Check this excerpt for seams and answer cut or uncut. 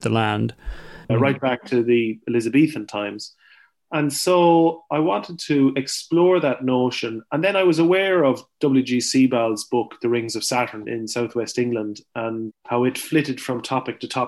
cut